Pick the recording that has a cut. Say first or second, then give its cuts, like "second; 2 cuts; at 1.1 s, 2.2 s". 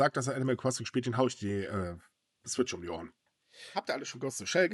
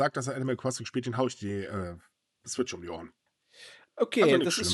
first; 1 cut; at 3.7 s